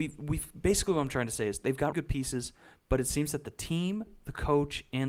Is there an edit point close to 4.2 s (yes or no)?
no